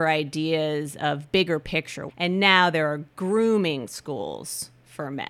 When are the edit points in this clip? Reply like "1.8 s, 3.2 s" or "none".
2.1 s